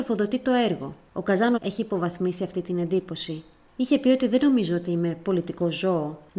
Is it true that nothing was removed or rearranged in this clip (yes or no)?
no